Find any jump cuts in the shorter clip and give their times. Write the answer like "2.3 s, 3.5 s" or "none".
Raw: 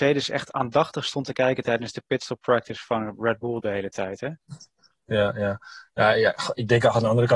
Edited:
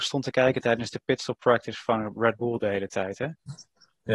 none

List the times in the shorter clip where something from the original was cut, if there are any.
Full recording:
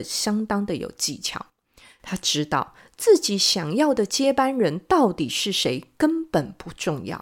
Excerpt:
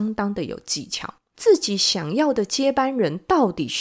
1.3 s

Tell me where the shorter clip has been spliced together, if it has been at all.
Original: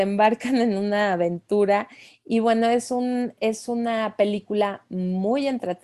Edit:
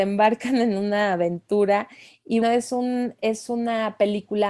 2.4 s

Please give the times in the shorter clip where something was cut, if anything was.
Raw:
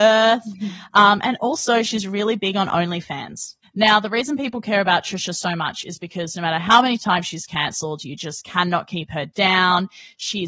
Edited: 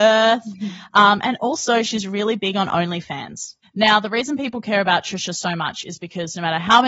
none

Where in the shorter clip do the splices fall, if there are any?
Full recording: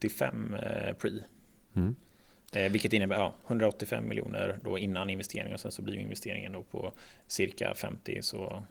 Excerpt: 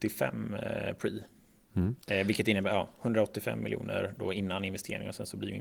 2.0 s

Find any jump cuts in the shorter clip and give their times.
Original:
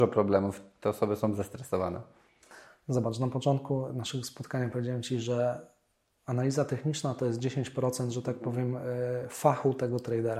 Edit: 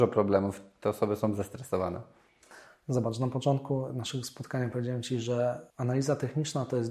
5.7 s

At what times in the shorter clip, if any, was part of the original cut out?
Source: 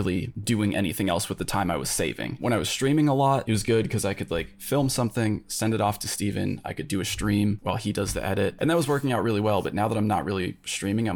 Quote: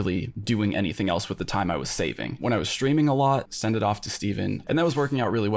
3.5 s, 4.6 s

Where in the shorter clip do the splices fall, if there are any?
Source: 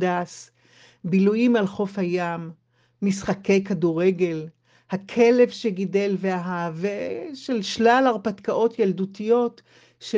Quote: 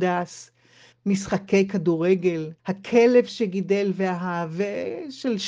0.9 s, 2.6 s

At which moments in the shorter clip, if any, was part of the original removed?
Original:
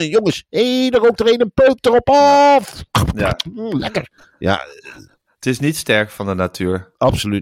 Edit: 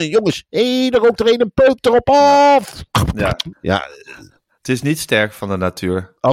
3.5 s

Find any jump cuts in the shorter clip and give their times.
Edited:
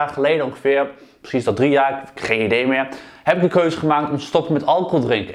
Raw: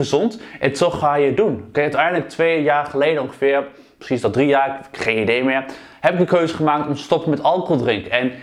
none

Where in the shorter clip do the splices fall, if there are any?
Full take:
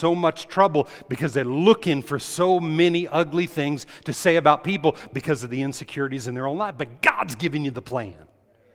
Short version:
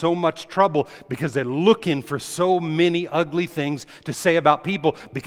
none

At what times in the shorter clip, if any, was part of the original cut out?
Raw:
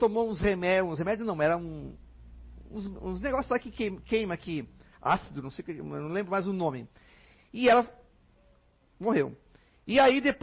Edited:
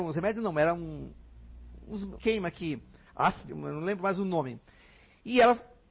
2.2 s, 3.5 s

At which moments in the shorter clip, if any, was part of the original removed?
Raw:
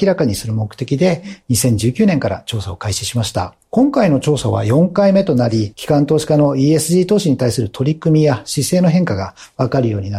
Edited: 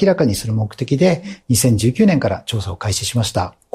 none

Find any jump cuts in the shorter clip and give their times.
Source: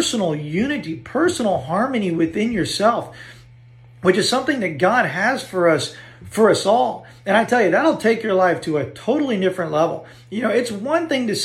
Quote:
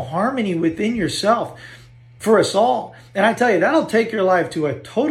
2.2 s

